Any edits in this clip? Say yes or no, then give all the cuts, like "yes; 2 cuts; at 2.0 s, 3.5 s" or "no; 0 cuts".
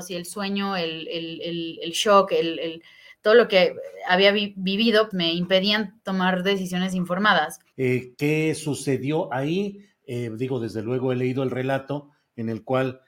yes; 2 cuts; at 5.1 s, 7.7 s